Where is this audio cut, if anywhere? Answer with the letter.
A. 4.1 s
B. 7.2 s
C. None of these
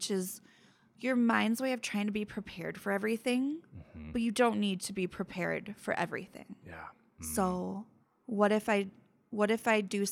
B